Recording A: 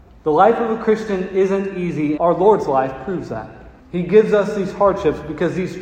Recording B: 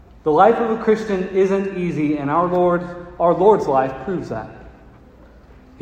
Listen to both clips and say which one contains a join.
A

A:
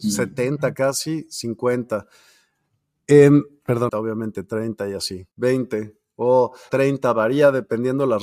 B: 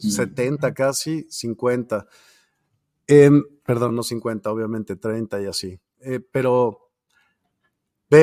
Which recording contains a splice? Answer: A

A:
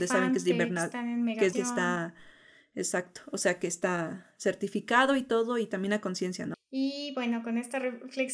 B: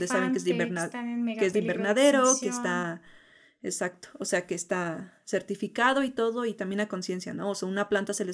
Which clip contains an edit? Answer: A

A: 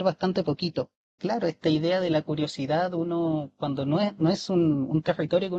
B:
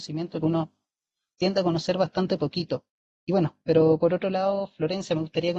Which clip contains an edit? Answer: A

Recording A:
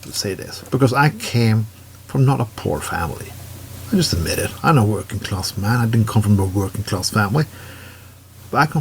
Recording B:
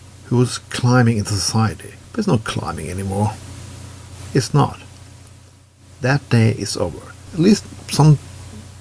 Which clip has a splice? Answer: B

